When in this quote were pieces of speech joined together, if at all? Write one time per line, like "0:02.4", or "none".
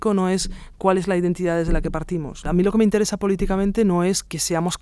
0:02.4